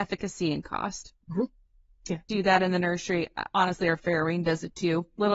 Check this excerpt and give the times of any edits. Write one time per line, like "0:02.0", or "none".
0:01.2
0:02.3